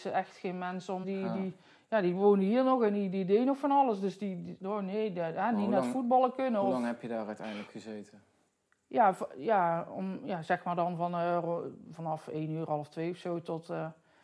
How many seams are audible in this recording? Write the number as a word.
one